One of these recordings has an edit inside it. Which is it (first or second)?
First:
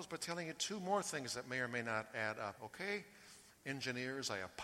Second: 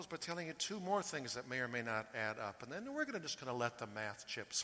first